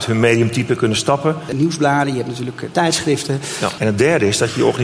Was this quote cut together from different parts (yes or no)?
yes